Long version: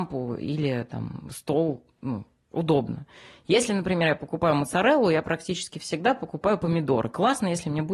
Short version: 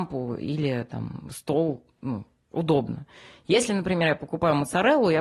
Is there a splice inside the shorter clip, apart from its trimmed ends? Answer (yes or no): no